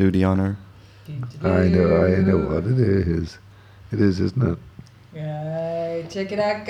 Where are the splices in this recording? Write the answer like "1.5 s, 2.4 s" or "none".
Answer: none